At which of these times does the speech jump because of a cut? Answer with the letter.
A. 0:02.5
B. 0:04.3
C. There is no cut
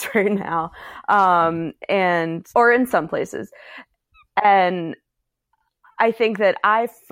A